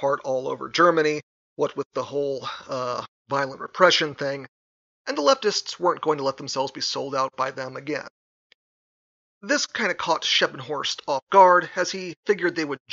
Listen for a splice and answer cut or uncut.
uncut